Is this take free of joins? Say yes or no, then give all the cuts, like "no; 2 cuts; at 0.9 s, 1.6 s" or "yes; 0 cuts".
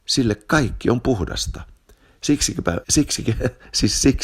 no; 1 cut; at 2.8 s